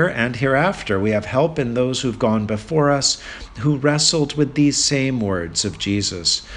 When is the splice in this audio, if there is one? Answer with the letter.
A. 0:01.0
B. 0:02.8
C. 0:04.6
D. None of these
D